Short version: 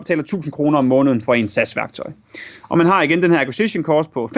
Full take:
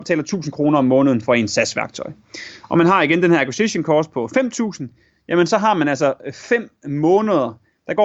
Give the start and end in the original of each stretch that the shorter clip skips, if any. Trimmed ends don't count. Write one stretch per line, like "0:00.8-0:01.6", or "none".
none

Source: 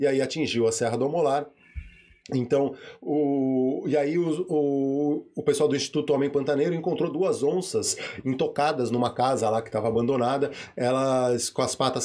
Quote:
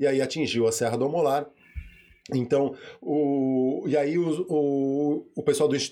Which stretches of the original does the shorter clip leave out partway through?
none

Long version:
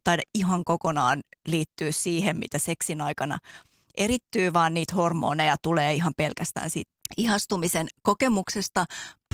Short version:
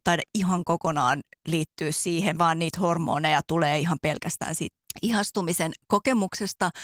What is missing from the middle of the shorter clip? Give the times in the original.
0:02.4-0:04.5

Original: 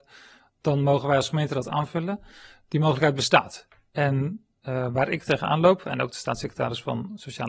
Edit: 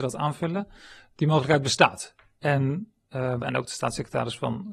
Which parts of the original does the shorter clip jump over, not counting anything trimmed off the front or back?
0:04.9-0:05.8

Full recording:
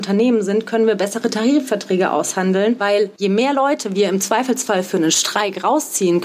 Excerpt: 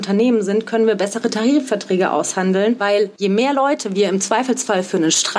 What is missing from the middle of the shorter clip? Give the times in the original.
none

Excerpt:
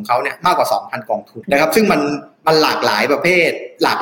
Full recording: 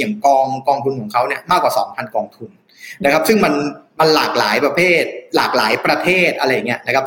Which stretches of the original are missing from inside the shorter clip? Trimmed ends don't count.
0:02.5-0:03.0

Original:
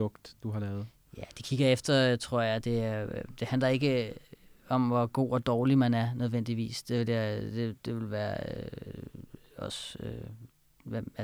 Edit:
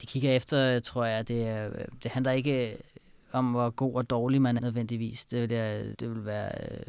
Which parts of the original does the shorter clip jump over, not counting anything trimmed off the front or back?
0:05.9-0:06.1
0:07.5-0:07.8

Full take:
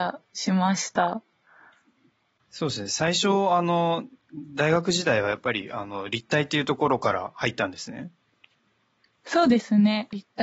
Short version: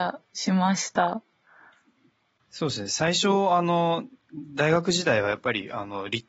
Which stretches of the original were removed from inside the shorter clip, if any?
none

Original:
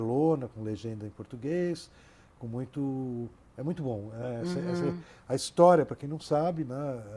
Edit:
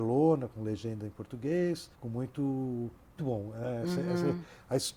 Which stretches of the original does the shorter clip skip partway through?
0:01.9-0:02.3
0:03.6-0:03.8

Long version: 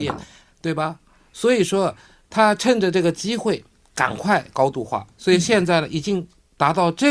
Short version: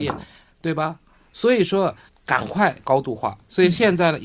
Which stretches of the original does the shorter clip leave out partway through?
0:02.1-0:03.8

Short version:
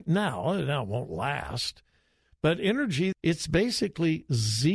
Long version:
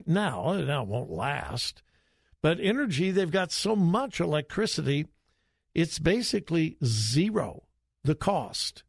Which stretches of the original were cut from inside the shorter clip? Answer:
0:03.1-0:05.6

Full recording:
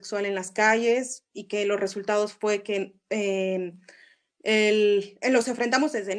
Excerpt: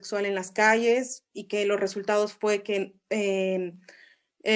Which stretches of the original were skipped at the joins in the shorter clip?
none

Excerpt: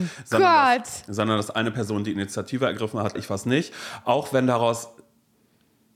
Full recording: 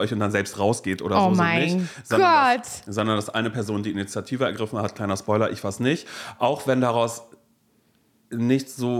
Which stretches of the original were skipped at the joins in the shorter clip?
0:04.9-0:05.5

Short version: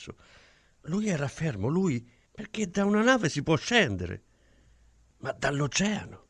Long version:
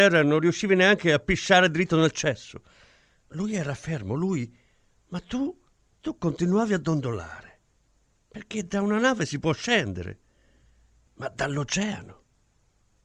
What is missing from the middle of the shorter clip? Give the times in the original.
0:04.7-0:08.2

